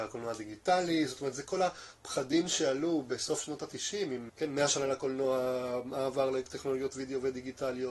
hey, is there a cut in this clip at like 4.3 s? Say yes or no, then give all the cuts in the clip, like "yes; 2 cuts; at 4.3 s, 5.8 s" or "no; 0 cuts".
yes; 1 cut; at 4.3 s